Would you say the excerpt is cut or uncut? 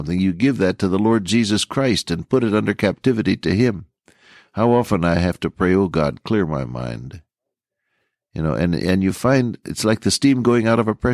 uncut